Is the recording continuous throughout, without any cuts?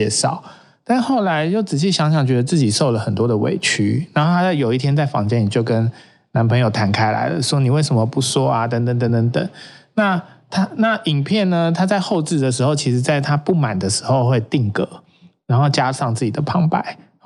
yes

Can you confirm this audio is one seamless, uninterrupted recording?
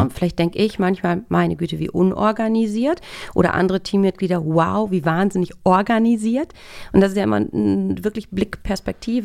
yes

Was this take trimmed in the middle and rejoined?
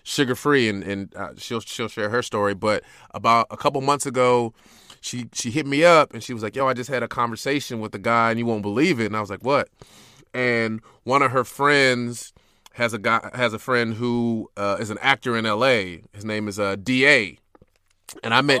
no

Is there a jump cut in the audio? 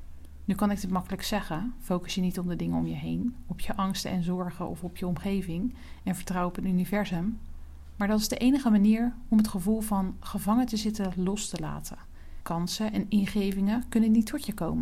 yes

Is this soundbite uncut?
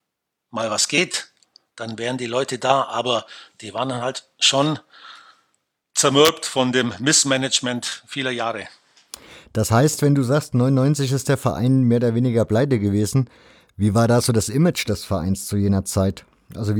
yes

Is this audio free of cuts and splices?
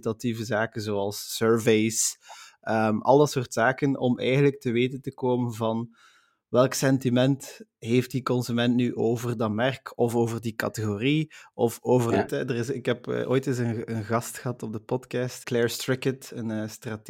no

